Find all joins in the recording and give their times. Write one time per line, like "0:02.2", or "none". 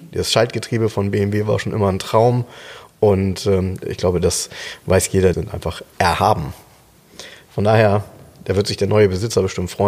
0:03.8
0:05.3